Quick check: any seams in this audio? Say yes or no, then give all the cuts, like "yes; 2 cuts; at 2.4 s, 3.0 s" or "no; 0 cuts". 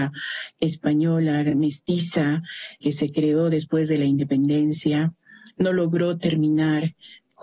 no; 0 cuts